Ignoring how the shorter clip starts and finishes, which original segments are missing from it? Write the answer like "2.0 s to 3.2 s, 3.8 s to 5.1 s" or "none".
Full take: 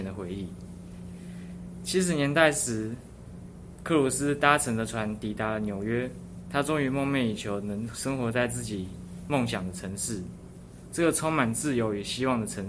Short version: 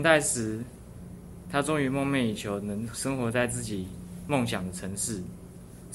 3.8 s to 6.4 s